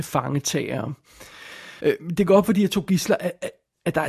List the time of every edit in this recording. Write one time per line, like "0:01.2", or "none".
0:01.8